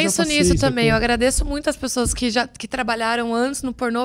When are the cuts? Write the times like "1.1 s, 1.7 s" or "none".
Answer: none